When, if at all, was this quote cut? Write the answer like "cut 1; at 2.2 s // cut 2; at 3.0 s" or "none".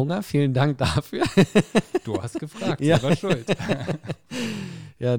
none